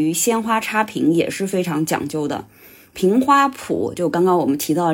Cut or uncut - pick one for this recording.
uncut